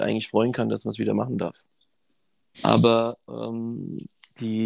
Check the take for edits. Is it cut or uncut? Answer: cut